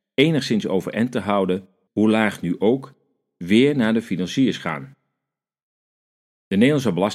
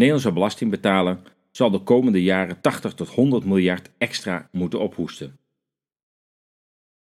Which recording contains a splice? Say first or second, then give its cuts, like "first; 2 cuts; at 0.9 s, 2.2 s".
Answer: first; 1 cut; at 1.9 s